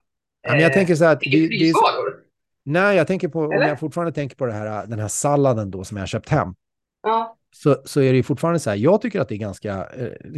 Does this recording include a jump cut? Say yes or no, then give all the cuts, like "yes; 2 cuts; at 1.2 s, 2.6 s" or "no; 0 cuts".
no; 0 cuts